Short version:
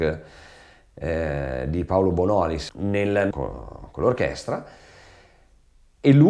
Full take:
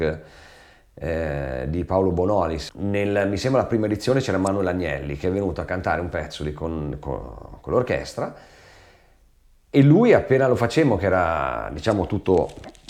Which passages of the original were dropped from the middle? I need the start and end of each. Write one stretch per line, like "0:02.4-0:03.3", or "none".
0:03.3-0:07.0

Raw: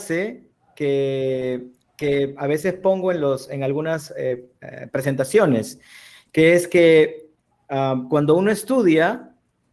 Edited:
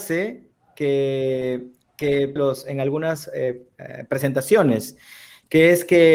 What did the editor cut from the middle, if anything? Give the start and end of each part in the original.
0:02.4-0:03.2

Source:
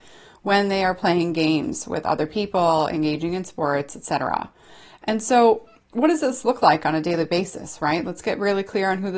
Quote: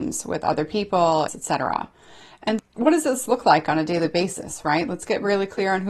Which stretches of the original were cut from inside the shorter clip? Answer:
0:02.9-0:03.9
0:05.2-0:05.8

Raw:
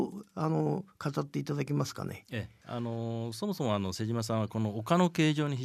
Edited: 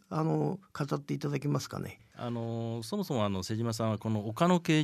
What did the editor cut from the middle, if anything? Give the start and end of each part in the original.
0:02.2-0:02.5

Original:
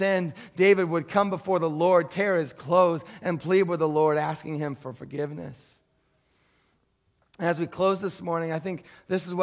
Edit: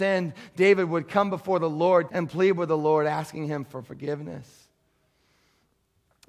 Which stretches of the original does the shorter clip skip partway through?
0:02.1-0:03.2

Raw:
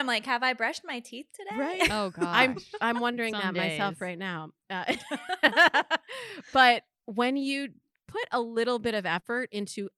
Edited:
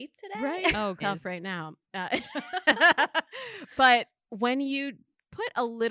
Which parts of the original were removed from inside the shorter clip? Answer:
0:02.2-0:03.8

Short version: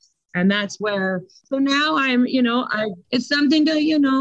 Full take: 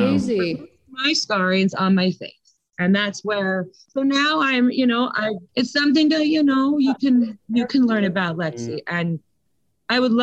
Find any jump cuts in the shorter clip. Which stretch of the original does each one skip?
none

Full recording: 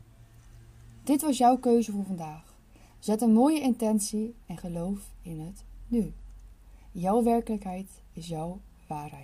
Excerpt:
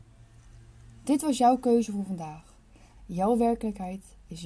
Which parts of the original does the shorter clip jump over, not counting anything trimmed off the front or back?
0:03.0-0:06.8

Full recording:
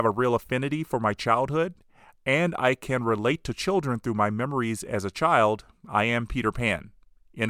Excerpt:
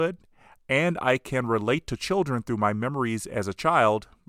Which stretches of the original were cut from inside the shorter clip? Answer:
none

